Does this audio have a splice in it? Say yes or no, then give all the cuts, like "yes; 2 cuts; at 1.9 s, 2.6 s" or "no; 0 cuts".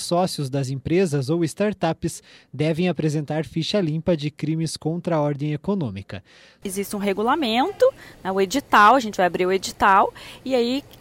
yes; 1 cut; at 6.6 s